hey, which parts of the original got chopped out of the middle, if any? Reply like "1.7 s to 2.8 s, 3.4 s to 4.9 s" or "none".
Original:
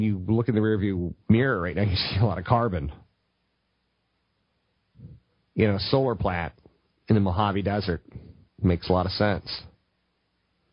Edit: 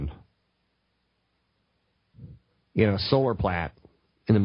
none